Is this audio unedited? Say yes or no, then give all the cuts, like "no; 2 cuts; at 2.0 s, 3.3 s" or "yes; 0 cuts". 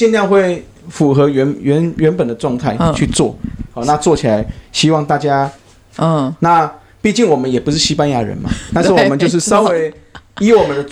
no; 2 cuts; at 6.0 s, 8.7 s